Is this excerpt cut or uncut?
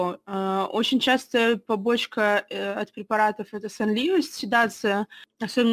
uncut